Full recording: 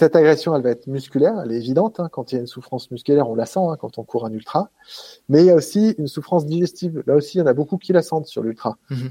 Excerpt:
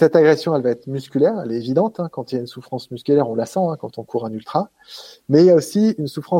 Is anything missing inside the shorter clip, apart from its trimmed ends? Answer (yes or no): no